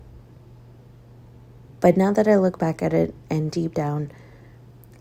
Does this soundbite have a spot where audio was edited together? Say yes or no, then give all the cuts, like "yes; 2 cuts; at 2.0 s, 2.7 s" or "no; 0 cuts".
no; 0 cuts